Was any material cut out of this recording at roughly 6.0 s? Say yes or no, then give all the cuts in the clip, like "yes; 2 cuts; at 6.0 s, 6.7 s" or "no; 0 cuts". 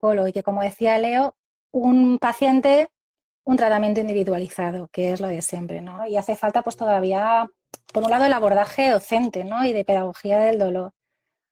yes; 1 cut; at 6.0 s